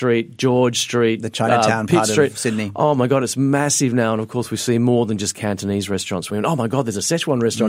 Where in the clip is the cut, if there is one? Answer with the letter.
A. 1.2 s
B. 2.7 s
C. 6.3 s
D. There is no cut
C